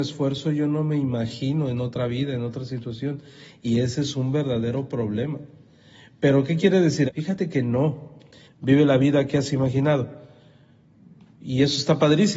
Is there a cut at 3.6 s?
no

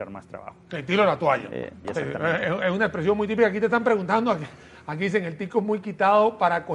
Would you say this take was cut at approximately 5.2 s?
no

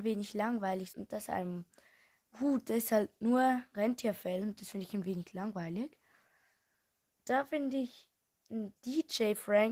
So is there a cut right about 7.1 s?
yes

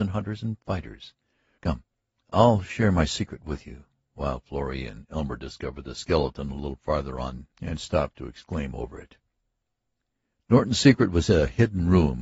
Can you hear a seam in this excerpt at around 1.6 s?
yes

